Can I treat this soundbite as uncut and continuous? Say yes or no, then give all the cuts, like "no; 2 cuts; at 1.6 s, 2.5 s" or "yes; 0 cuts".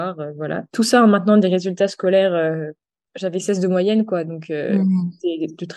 yes; 0 cuts